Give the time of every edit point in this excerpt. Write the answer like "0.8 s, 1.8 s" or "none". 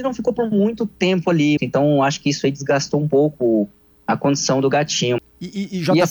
1.6 s, 5.2 s